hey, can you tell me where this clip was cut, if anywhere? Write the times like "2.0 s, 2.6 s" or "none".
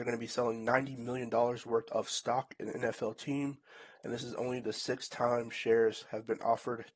none